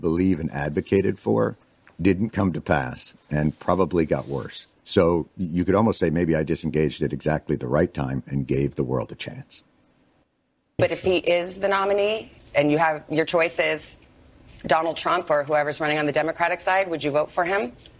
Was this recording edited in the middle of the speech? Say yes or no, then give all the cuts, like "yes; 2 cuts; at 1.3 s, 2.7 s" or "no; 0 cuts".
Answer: yes; 1 cut; at 10.8 s